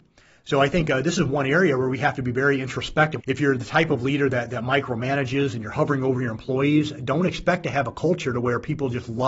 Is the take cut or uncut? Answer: cut